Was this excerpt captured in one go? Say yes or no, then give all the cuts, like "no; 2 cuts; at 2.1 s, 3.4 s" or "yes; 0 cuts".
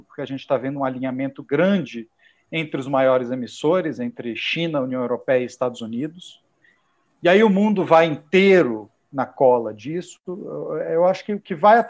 yes; 0 cuts